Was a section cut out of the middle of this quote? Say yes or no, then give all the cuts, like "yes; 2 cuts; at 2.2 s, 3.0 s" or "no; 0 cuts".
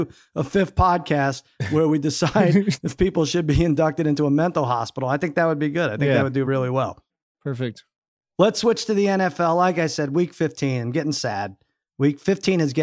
no; 0 cuts